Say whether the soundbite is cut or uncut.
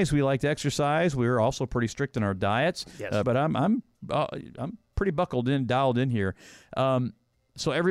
cut